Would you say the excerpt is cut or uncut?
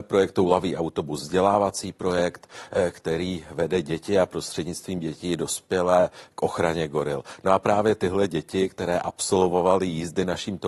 uncut